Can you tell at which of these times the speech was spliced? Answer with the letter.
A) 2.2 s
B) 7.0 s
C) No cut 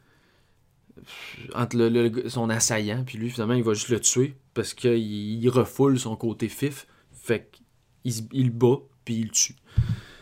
C